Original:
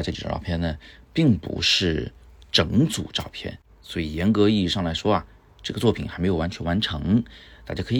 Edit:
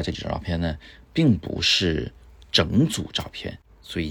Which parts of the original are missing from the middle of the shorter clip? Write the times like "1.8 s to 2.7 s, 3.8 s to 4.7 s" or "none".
none